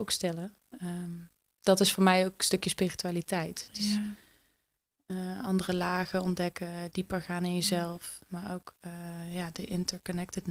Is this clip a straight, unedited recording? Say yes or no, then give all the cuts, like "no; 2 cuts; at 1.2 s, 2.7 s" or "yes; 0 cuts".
yes; 0 cuts